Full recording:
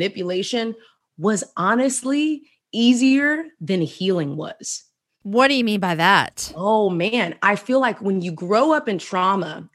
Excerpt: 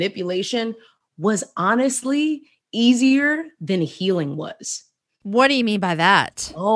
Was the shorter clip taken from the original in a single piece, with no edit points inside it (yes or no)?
yes